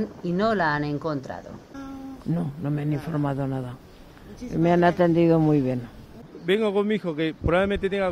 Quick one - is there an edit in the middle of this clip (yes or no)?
no